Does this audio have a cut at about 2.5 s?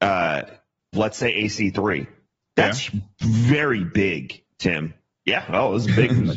no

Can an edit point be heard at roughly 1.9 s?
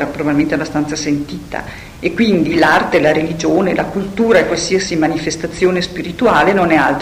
no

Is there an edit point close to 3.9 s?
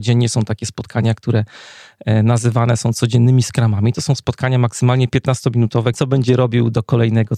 no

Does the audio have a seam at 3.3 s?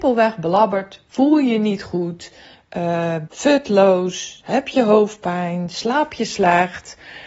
yes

